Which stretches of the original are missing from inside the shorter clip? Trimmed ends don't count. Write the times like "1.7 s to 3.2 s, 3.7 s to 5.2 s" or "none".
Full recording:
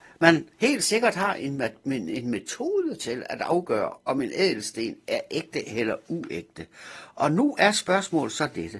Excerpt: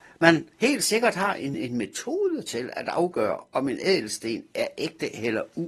1.5 s to 2.1 s